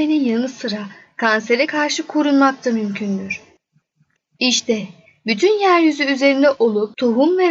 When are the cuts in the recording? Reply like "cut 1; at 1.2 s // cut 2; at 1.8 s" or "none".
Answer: cut 1; at 4.3 s